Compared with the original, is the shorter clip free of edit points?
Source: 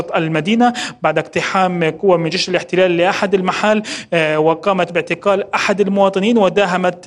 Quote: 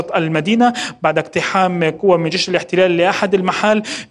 yes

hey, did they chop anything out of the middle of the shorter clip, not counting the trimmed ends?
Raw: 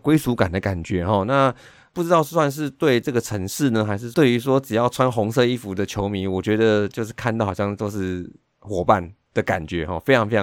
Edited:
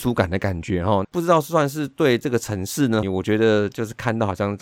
yes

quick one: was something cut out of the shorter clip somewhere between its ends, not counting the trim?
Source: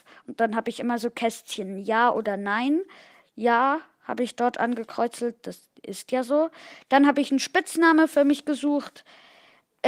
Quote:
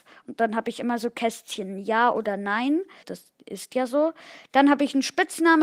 yes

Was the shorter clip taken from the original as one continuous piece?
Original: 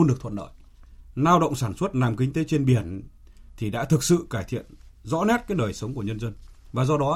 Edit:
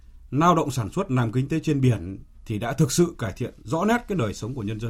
no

